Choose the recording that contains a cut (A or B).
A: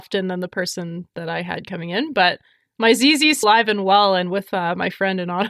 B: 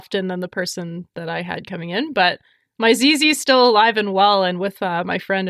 A